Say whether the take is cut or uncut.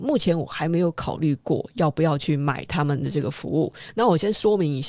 uncut